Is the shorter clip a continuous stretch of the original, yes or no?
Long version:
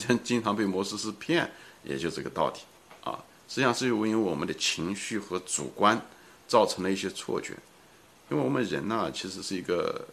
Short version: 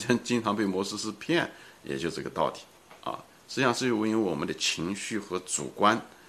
yes